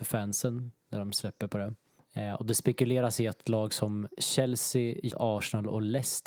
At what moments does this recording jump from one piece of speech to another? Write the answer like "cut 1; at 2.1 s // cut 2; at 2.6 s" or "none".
cut 1; at 5.1 s